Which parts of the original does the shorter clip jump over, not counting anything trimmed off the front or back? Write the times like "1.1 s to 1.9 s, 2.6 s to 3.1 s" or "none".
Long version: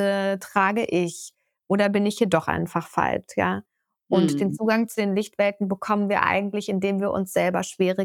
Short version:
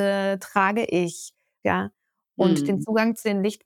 1.6 s to 3.4 s